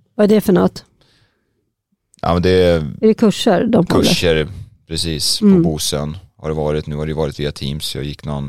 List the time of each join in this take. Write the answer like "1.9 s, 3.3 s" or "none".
none